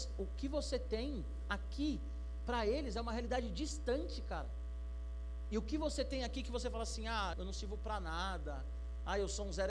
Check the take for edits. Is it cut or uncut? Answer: cut